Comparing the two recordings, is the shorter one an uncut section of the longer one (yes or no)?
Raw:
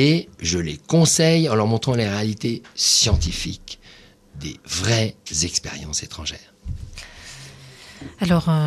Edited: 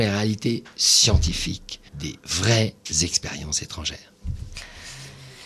no